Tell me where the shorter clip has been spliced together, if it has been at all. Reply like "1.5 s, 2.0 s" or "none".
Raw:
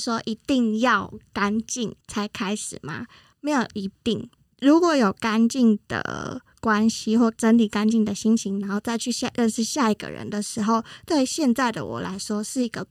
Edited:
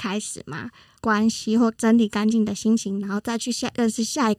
1.0 s